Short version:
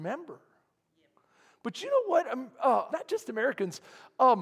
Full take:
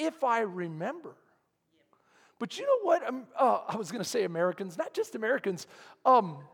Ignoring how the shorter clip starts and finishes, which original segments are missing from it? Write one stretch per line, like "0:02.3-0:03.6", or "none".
0:03.6-0:04.7